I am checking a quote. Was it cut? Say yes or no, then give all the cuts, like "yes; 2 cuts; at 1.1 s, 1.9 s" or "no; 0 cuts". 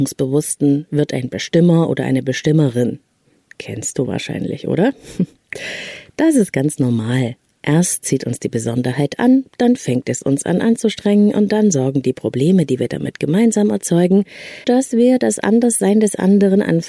yes; 1 cut; at 14.6 s